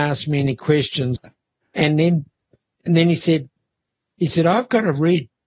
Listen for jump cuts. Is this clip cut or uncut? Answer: cut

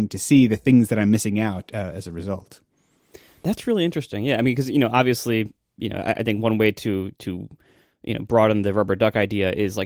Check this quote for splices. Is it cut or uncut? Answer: uncut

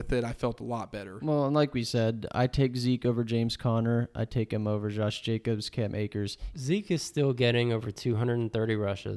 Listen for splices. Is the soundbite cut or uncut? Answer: cut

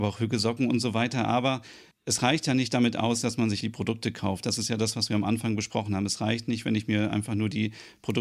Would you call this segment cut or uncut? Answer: cut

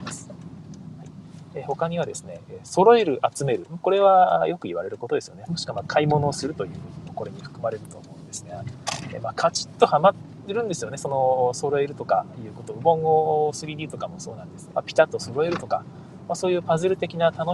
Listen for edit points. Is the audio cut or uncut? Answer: cut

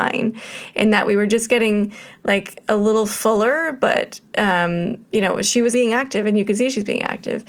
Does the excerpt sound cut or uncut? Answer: cut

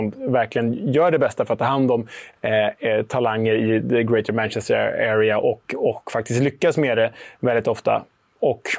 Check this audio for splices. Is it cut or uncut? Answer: uncut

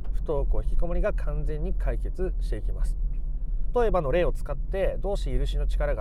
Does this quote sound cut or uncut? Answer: cut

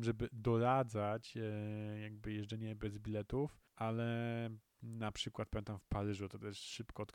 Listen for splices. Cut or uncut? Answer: cut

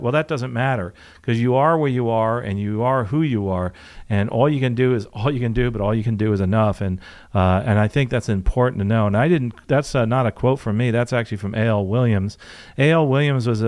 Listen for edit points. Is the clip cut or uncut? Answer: uncut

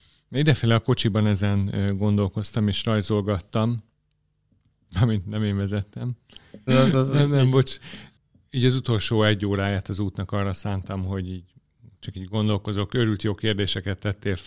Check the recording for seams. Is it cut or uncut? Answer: cut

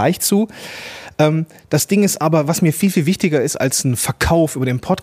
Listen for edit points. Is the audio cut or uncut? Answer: uncut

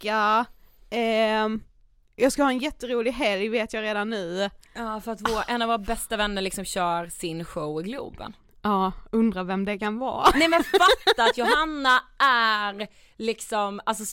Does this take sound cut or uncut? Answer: uncut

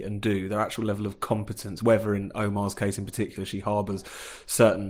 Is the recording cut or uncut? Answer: uncut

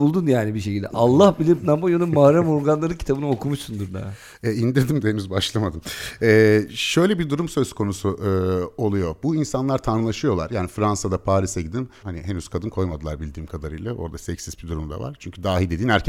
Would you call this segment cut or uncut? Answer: cut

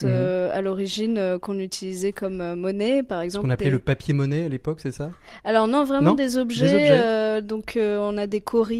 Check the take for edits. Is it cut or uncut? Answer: uncut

